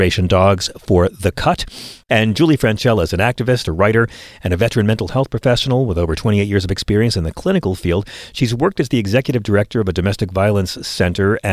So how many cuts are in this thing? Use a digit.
1